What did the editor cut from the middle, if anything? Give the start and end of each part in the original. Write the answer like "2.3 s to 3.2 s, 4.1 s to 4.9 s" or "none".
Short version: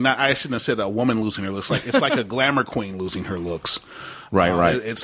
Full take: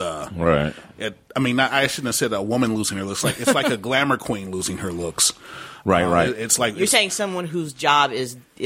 none